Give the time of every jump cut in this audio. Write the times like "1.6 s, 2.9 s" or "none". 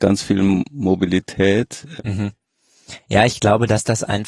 2.0 s